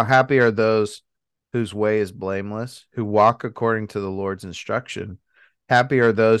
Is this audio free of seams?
yes; 0 cuts

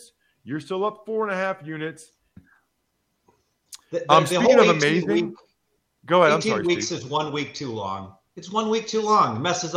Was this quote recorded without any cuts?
no; 1 cut; at 2.4 s

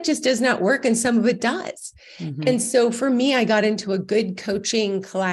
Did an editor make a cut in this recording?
no; 0 cuts

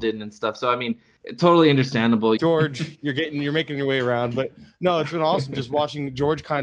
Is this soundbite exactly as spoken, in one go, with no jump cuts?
no; 1 cut; at 2.4 s

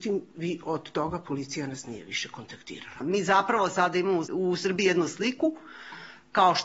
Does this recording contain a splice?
yes; 2 cuts; at 3.0 s, 4.3 s

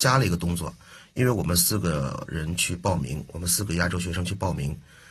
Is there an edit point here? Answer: no; 0 cuts

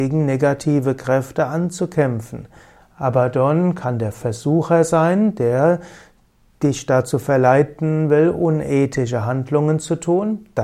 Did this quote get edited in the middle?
no; 0 cuts

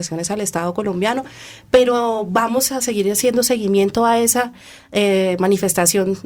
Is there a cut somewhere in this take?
no; 0 cuts

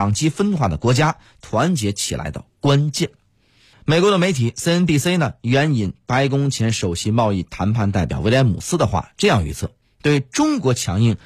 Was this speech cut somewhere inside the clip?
yes; 1 cut; at 3.7 s

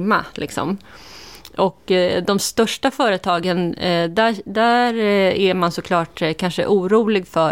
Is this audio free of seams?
yes; 0 cuts

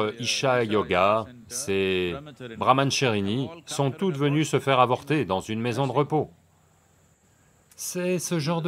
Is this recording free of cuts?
yes; 0 cuts

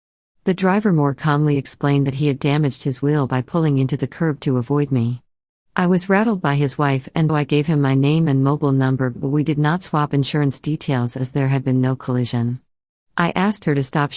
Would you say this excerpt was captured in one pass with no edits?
no; 1 cut; at 7.3 s

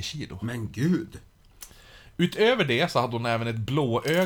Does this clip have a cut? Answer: no; 0 cuts

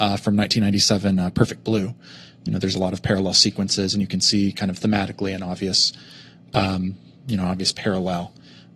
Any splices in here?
no; 0 cuts

